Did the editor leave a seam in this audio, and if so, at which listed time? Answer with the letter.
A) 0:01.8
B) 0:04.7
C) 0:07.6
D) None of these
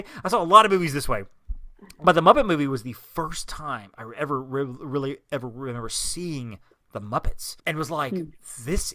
C